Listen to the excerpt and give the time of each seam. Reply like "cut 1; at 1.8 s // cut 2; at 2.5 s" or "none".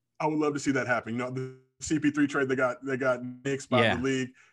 none